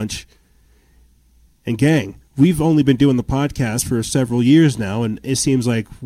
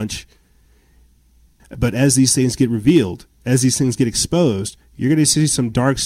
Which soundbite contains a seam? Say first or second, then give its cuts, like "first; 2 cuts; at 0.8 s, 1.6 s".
second; 1 cut; at 1.6 s